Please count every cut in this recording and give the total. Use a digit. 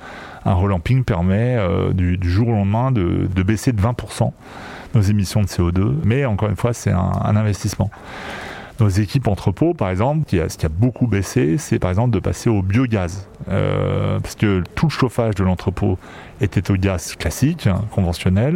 0